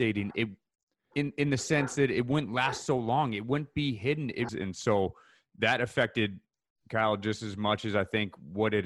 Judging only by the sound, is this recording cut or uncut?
cut